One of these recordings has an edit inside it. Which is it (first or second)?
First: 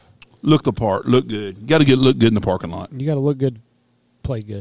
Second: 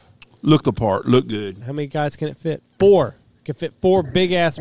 second